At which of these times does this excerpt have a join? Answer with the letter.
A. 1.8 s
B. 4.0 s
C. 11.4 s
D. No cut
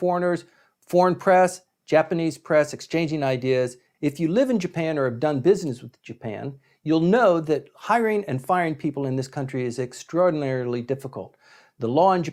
B